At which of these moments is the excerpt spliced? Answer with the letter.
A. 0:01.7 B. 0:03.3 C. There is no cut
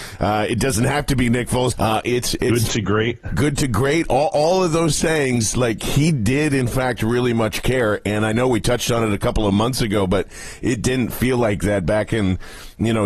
A